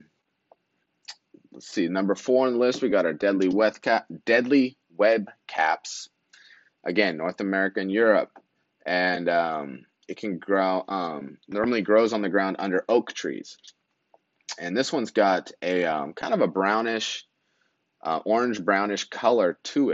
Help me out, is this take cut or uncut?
uncut